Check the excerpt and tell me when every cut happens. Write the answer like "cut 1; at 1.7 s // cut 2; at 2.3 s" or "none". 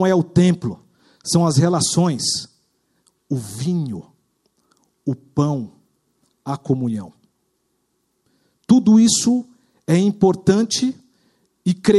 none